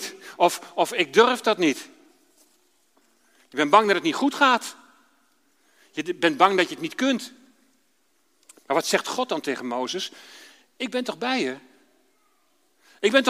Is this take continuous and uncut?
yes; 0 cuts

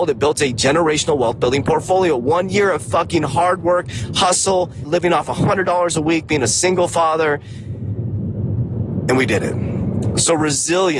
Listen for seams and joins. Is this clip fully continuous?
no; 1 cut; at 4.8 s

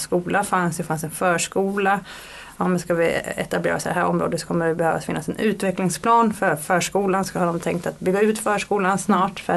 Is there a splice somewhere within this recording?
no; 0 cuts

